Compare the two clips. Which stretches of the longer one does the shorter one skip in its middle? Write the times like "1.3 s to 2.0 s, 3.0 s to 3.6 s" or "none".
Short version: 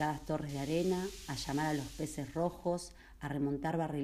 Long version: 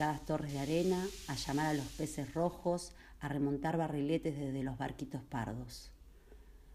none